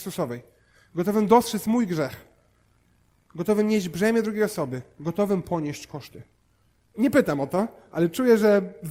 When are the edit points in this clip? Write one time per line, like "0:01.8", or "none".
0:06.9